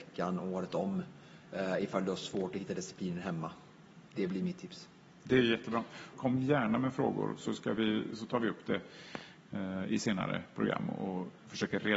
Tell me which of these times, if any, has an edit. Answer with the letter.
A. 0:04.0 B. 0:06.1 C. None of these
B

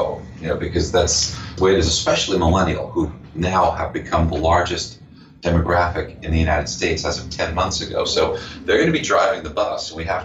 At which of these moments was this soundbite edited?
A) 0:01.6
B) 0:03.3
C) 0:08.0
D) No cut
A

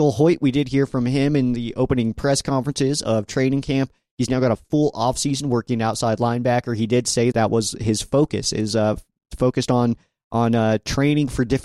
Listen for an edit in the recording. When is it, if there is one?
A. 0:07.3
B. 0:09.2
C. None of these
A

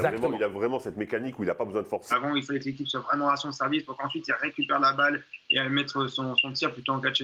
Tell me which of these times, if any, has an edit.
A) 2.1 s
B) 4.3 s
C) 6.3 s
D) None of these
A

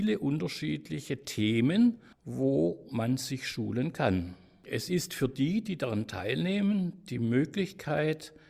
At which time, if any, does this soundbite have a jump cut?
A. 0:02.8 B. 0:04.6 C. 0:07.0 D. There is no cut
D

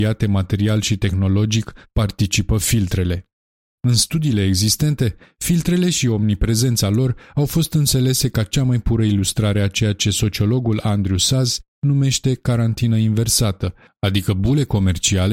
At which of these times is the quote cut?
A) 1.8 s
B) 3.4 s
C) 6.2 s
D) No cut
A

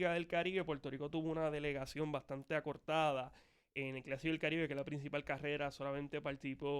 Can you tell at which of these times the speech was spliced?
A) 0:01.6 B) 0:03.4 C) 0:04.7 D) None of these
D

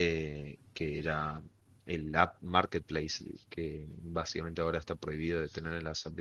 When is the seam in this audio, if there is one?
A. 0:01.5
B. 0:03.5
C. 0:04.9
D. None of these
D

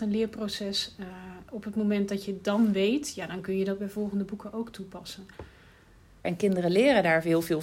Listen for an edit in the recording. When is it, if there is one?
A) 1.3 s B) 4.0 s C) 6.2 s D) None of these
C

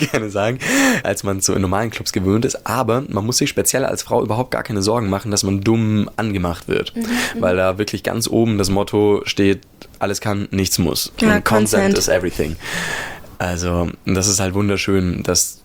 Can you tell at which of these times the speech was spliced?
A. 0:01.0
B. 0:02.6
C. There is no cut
A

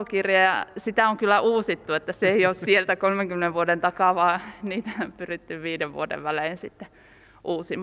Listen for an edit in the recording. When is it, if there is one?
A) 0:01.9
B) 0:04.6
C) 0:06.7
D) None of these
D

